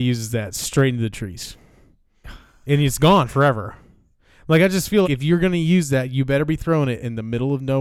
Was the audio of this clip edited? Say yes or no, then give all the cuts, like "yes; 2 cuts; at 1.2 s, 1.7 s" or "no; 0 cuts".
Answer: yes; 1 cut; at 5.0 s